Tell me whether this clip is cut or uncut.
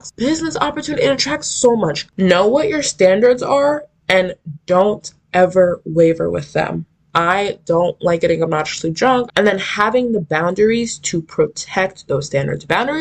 cut